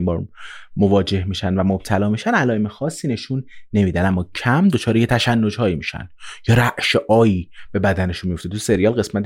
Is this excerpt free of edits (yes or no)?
no